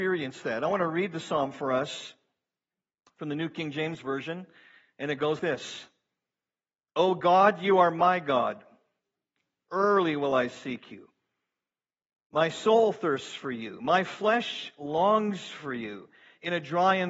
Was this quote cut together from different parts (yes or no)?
yes